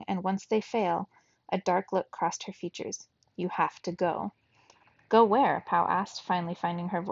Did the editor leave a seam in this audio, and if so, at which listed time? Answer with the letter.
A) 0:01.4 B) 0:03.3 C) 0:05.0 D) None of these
D